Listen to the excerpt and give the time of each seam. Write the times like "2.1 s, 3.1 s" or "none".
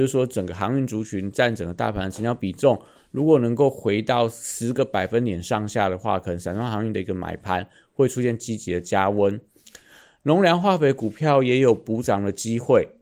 none

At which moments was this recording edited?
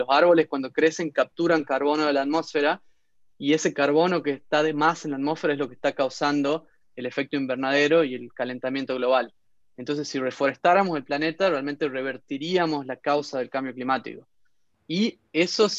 none

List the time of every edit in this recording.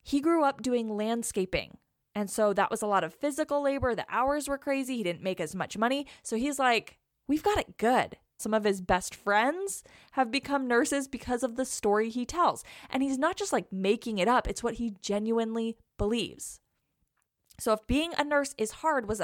7.1 s, 8.4 s

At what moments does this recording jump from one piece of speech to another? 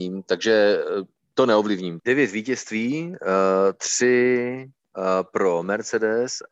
2.0 s

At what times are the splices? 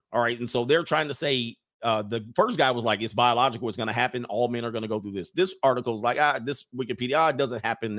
none

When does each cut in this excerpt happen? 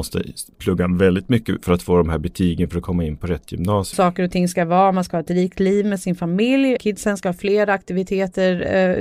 3.9 s, 6.8 s

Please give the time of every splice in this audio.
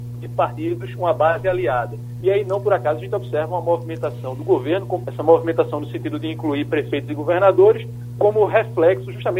2.2 s, 5.0 s, 8.2 s

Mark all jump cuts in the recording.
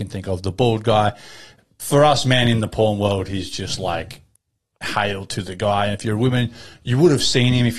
none

